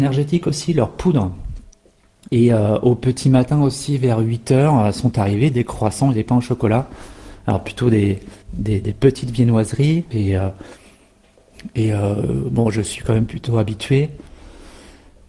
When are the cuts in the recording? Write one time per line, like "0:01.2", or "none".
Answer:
0:02.3
0:08.4
0:10.1